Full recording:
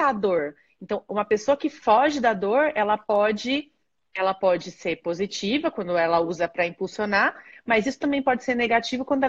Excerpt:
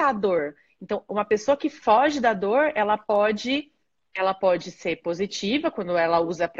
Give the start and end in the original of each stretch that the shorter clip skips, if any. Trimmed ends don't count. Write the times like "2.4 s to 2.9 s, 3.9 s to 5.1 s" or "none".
none